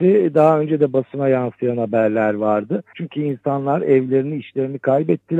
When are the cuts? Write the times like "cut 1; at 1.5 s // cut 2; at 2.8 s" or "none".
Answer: cut 1; at 2.9 s